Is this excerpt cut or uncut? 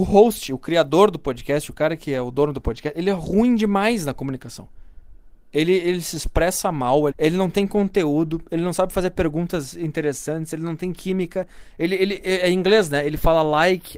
cut